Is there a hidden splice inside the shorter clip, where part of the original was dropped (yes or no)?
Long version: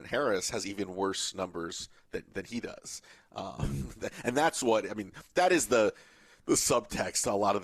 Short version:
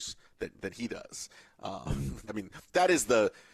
yes